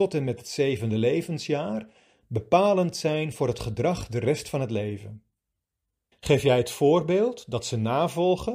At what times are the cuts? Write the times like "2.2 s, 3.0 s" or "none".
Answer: 6.1 s

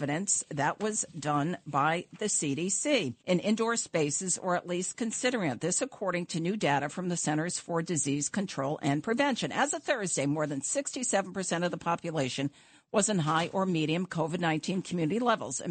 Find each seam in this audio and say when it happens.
3.2 s

